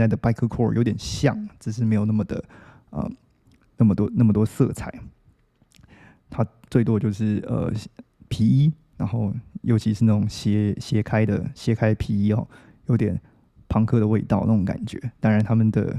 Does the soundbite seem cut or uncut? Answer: cut